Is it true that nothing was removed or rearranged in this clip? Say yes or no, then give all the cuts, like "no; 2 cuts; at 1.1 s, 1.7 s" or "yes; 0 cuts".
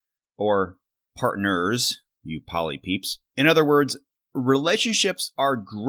no; 1 cut; at 3.3 s